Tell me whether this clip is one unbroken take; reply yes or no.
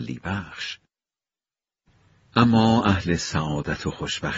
yes